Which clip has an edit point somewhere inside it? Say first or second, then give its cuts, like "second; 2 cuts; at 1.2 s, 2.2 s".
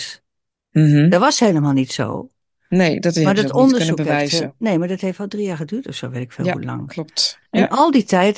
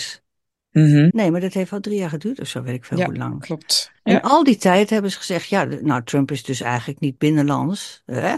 second; 1 cut; at 1.1 s